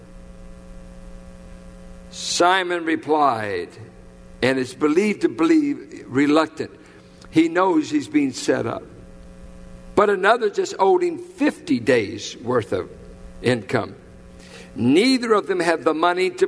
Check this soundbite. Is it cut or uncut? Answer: cut